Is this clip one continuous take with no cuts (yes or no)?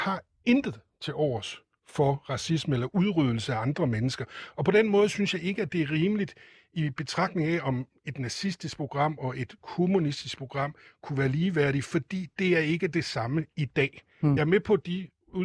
yes